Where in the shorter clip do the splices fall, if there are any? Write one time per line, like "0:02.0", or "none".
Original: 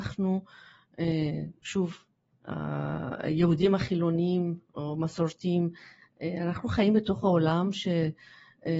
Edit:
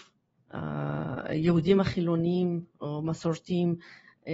none